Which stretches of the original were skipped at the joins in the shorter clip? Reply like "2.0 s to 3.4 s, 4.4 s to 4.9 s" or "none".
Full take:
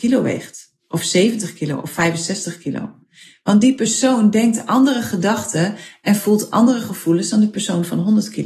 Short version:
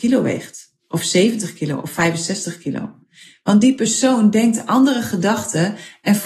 none